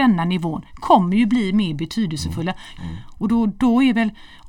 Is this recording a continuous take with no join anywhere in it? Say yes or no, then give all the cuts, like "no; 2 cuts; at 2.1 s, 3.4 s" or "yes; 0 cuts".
no; 1 cut; at 2.8 s